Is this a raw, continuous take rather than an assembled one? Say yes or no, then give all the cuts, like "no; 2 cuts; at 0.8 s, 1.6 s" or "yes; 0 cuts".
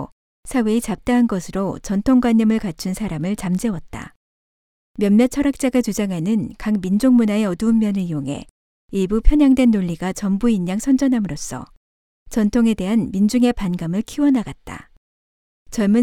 yes; 0 cuts